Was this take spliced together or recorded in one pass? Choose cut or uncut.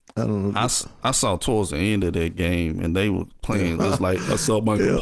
cut